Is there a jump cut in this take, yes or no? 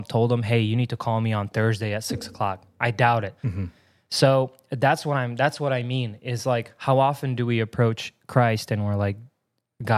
yes